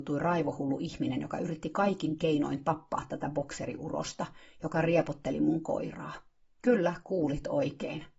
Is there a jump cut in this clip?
no; 0 cuts

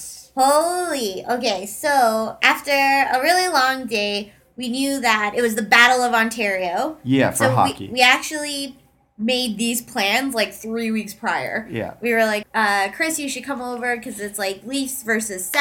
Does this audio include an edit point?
yes; 1 cut; at 12.4 s

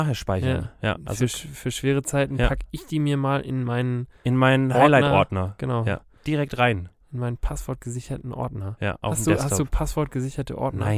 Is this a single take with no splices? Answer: yes; 0 cuts

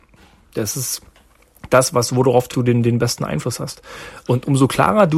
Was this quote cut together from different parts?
no; 0 cuts

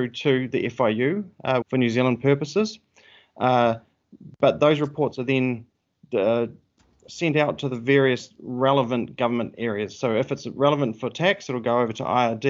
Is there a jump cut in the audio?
yes; 1 cut; at 1.6 s

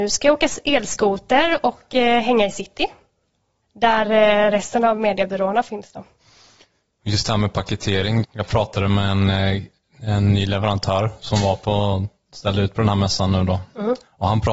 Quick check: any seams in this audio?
no; 0 cuts

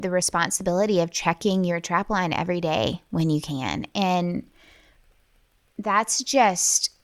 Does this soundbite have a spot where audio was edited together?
no; 0 cuts

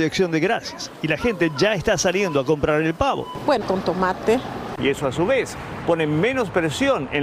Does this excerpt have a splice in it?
yes; 2 cuts; at 3.6 s, 4.8 s

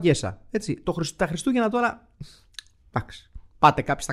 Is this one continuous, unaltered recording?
yes; 0 cuts

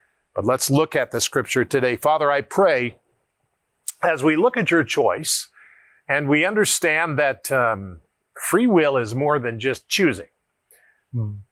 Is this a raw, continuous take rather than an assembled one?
yes; 0 cuts

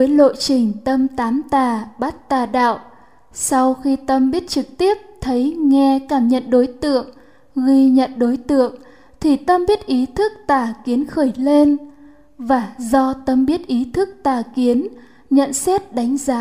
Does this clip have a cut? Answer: no; 0 cuts

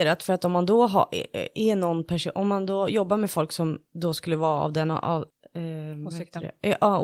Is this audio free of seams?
yes; 0 cuts

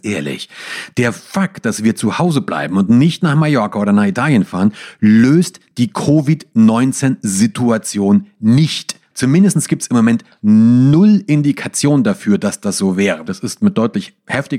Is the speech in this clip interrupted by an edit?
yes; 2 cuts; at 9.1 s, 13.3 s

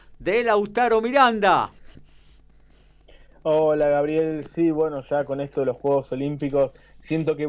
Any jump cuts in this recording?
no; 0 cuts

